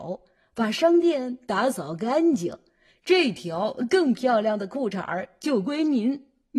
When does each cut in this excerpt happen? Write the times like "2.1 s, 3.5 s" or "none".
none